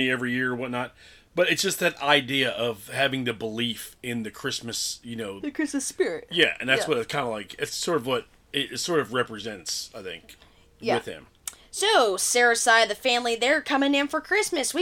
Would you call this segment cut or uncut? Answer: cut